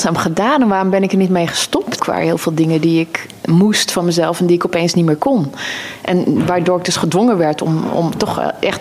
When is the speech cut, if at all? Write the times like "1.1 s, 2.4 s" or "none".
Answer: 2.0 s